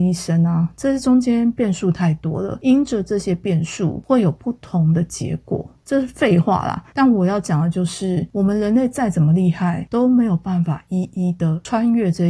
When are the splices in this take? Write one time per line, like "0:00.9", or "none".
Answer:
0:08.3